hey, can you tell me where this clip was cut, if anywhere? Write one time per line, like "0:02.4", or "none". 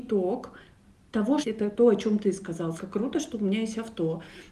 0:01.4
0:02.8